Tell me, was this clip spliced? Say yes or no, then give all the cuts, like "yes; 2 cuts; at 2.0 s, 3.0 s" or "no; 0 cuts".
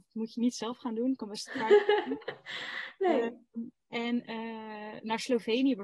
no; 0 cuts